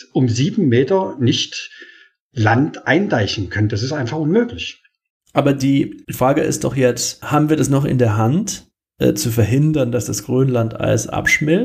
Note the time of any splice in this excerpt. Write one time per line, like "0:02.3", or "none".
none